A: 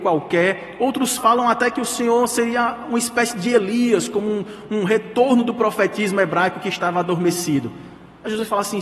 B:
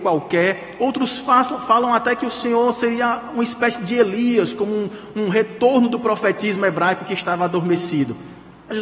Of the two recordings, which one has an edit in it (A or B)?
A